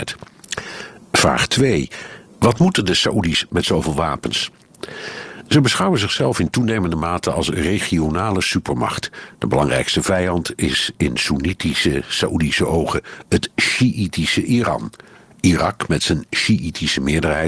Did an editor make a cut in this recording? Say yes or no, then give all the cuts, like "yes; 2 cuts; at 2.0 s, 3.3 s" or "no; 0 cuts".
no; 0 cuts